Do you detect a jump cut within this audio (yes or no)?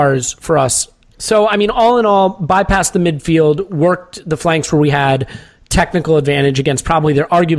yes